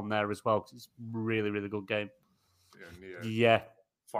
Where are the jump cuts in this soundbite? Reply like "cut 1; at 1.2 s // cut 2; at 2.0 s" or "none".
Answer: cut 1; at 2.7 s